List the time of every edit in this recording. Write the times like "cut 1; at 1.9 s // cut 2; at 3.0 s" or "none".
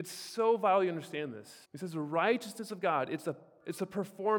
cut 1; at 1.6 s